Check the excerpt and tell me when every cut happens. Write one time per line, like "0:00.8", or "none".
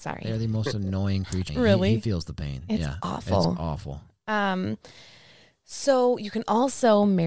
0:01.5